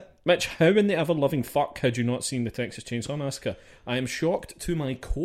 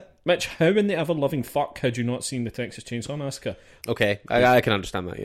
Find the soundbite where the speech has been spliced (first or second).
second